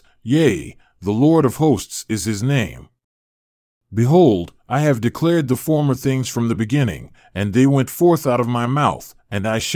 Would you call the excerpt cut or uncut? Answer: uncut